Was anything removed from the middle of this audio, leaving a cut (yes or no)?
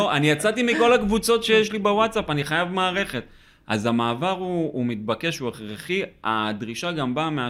no